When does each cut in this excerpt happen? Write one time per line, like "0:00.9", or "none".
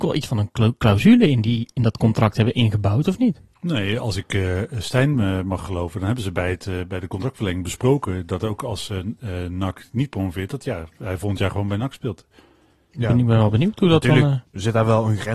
none